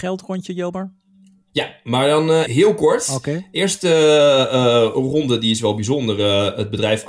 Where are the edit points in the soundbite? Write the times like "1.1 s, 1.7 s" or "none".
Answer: 2.5 s

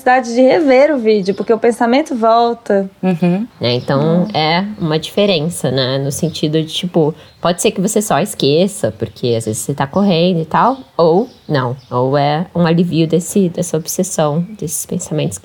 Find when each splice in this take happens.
3.5 s

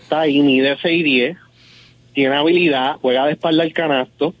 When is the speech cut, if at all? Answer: 3.0 s

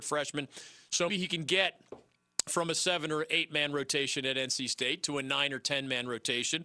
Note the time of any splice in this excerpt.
1.1 s

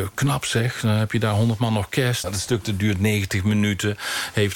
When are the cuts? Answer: 2.2 s

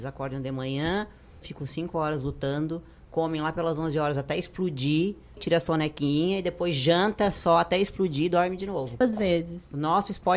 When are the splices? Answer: 1.4 s, 5.4 s, 9.0 s

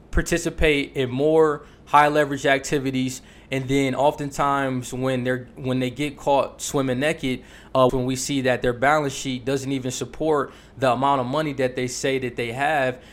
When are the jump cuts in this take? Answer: 7.9 s

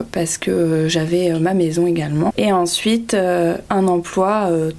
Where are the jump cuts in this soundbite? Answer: 2.3 s, 3.7 s

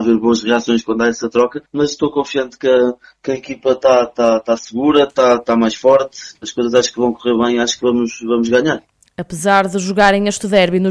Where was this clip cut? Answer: none

